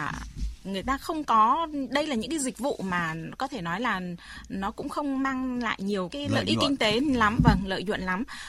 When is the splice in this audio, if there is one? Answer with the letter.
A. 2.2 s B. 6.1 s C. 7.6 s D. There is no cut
B